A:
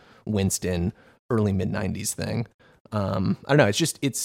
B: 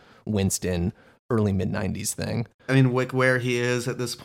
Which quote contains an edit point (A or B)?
B